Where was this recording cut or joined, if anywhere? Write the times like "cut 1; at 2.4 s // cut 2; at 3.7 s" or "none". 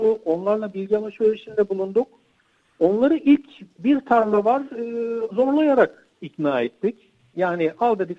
cut 1; at 5.3 s